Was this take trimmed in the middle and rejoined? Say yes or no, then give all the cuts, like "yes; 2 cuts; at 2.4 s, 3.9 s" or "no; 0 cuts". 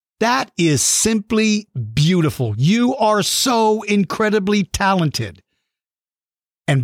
no; 0 cuts